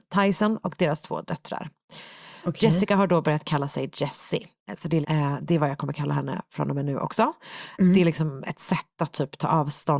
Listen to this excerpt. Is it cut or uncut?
cut